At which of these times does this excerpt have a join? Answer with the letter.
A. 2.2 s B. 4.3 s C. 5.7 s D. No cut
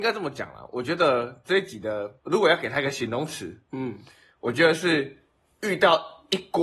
A